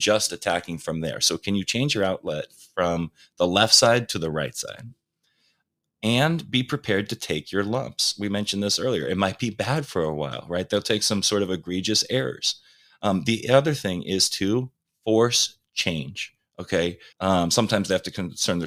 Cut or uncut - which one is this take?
cut